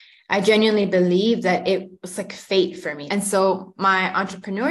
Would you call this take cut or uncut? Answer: cut